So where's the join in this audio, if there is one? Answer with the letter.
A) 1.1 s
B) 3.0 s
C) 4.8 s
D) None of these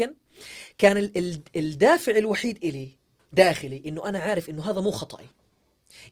D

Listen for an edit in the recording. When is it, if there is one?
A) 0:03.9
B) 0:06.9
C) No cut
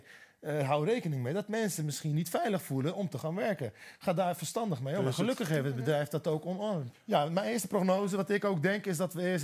B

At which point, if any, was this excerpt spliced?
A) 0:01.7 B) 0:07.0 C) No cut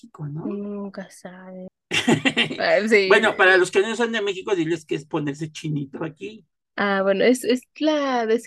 A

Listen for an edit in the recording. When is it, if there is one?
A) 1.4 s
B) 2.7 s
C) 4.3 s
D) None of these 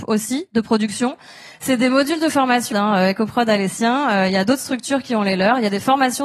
B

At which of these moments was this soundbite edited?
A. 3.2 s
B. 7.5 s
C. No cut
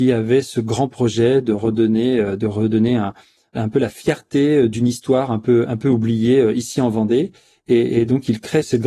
C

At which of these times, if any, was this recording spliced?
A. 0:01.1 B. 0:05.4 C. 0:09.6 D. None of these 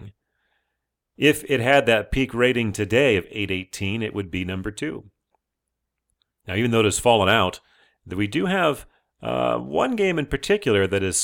D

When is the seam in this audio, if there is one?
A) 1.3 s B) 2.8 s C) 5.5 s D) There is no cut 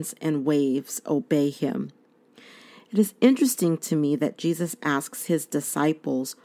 D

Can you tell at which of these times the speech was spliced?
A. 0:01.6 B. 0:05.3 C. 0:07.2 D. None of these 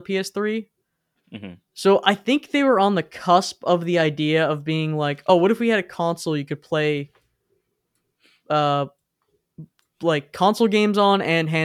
D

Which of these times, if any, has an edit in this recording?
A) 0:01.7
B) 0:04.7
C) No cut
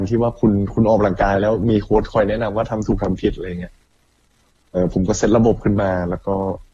B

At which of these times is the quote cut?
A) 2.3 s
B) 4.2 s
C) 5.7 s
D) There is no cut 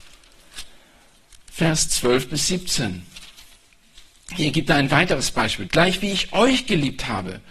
C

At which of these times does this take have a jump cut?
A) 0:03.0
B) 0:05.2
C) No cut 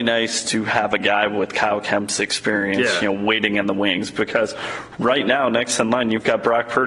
C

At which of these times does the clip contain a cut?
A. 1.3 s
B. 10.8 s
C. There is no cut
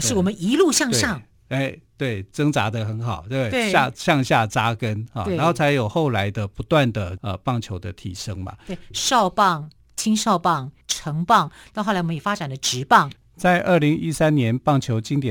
B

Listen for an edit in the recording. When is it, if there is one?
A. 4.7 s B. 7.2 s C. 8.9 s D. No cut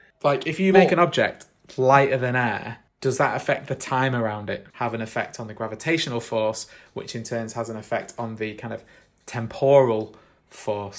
A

